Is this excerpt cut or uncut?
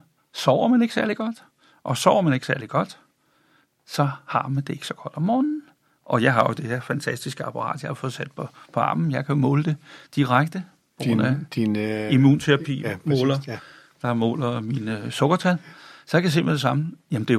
uncut